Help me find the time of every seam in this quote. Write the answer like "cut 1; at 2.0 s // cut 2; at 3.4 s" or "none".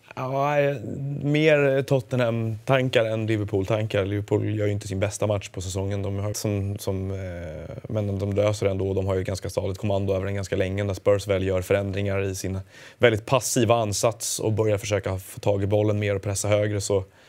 cut 1; at 6.3 s